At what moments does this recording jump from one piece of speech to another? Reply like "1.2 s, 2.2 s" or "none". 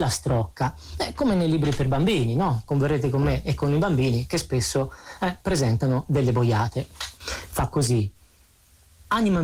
7.1 s

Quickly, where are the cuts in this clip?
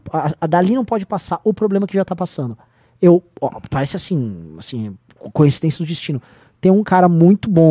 none

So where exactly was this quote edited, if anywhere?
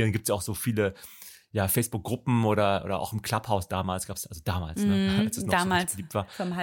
none

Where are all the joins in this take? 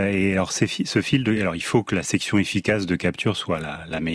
none

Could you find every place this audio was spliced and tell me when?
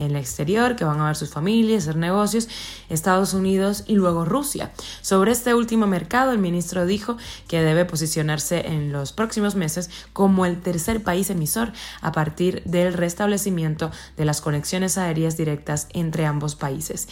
none

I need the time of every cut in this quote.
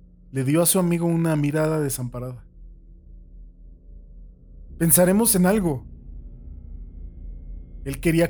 4.7 s

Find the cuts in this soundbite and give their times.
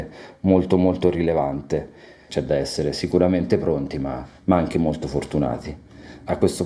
2.3 s

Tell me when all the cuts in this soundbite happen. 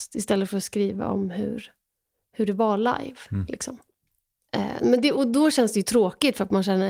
none

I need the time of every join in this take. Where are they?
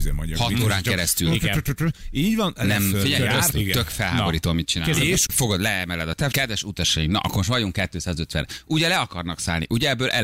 3.5 s, 5.3 s, 6.3 s

